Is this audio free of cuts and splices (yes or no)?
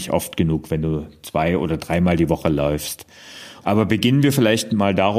no